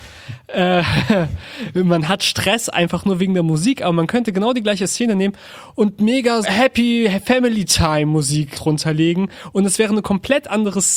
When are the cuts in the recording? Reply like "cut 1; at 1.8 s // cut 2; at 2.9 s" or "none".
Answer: cut 1; at 6.4 s // cut 2; at 8.5 s